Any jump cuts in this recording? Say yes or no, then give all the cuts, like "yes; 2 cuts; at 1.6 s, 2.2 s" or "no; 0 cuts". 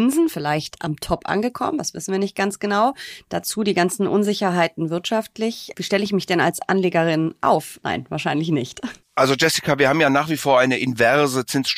yes; 1 cut; at 7.8 s